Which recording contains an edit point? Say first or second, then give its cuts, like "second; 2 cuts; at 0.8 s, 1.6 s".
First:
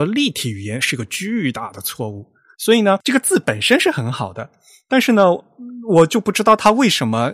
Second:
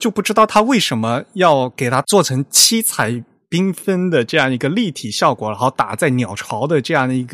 first; 1 cut; at 2.5 s